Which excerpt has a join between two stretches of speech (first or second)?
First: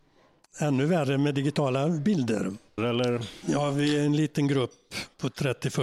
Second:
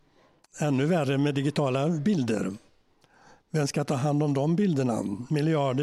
first